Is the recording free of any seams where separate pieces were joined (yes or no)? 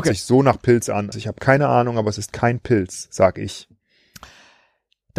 no